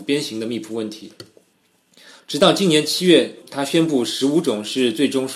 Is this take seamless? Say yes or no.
no